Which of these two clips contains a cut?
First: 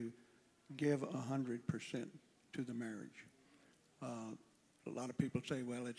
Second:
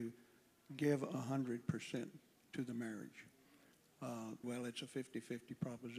second; 1 cut; at 4.4 s

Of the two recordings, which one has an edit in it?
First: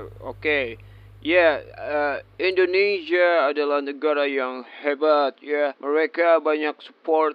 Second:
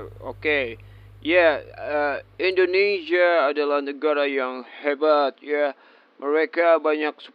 first; 1 cut; at 5.7 s

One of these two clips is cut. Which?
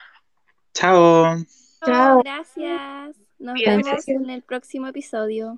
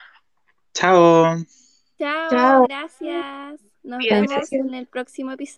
first; 1 cut; at 1.8 s

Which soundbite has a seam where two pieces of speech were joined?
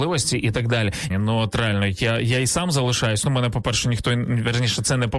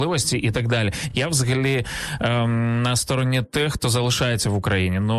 first; 1 cut; at 1.1 s

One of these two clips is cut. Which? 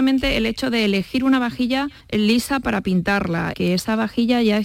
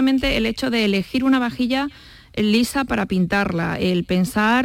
first; 2 cuts; at 2.0 s, 3.5 s

